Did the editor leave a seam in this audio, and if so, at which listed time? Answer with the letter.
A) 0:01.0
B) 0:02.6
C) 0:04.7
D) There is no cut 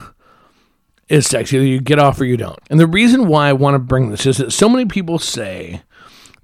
B